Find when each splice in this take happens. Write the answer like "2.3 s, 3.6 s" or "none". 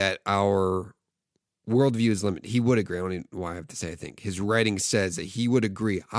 none